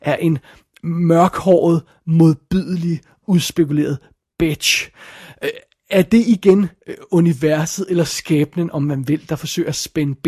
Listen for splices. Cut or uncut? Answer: uncut